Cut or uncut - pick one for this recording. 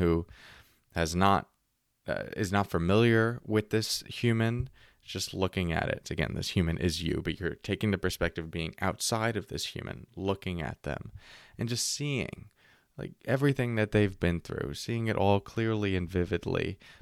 cut